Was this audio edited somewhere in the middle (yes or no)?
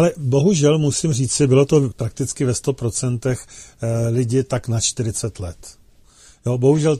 yes